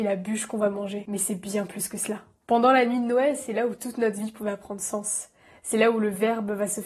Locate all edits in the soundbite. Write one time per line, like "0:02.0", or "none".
none